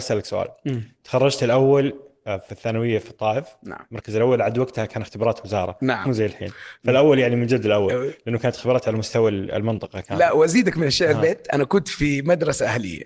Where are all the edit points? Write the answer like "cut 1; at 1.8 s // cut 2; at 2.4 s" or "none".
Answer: none